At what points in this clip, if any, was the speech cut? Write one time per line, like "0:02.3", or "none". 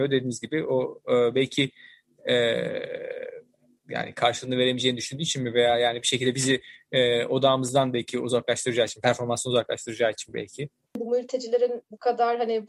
none